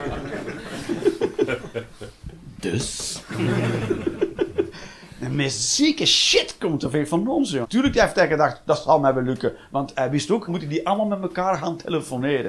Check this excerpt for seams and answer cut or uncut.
cut